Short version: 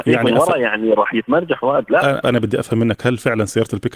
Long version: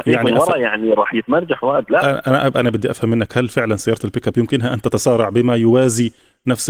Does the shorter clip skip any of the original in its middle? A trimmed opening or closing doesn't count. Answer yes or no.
yes